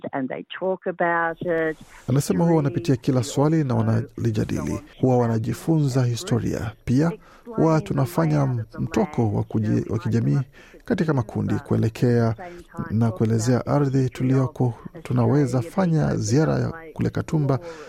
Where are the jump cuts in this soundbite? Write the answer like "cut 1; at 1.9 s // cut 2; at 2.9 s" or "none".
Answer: cut 1; at 2.1 s // cut 2; at 4.9 s